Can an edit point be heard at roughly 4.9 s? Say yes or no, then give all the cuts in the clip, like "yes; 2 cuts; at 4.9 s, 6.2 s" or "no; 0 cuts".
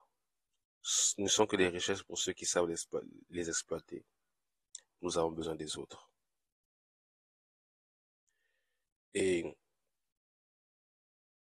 yes; 2 cuts; at 4.9 s, 9.0 s